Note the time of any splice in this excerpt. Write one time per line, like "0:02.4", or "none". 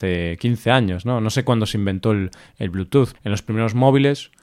0:03.2